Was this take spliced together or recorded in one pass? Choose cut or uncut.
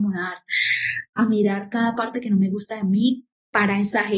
uncut